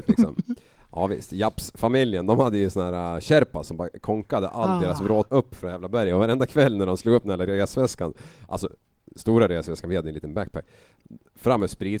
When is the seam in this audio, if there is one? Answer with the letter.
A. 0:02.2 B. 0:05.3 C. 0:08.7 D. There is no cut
B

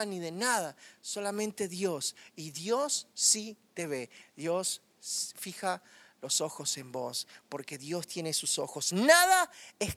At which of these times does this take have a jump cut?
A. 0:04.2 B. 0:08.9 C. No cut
A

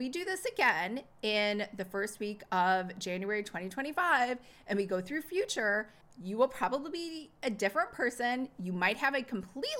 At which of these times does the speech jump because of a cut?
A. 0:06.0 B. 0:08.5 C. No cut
A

